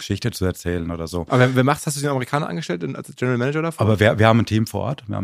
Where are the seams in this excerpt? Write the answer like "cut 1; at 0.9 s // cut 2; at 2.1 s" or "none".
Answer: none